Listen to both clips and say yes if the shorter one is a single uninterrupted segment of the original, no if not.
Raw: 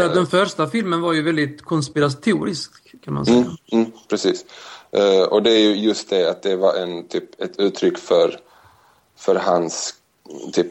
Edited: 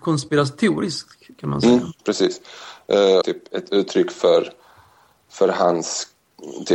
no